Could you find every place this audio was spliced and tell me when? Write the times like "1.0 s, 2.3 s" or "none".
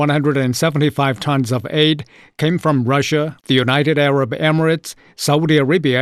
3.4 s